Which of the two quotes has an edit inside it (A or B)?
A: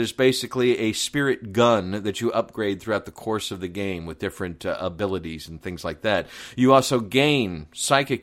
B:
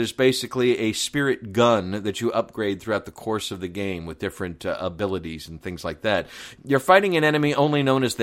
B